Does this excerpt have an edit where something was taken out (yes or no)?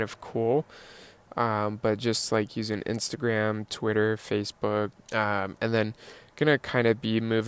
yes